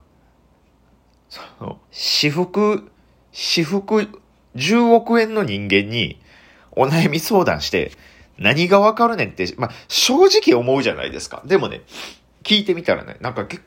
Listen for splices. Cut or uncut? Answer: cut